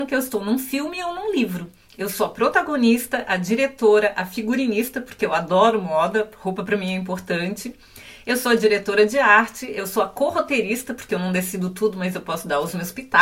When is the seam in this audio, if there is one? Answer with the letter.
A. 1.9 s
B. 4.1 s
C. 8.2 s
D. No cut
D